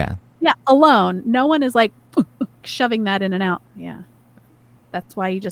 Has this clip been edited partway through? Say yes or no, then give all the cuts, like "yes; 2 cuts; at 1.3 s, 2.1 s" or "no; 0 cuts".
yes; 2 cuts; at 2.6 s, 3.7 s